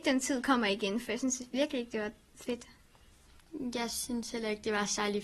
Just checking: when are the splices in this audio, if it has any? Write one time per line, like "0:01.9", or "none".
none